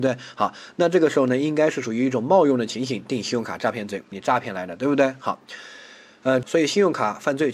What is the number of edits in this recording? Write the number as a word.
two